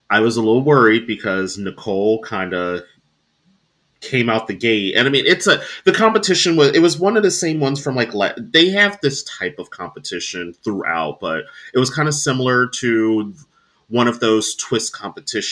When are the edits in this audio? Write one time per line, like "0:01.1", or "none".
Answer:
none